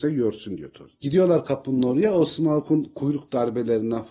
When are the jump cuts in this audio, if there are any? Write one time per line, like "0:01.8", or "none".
none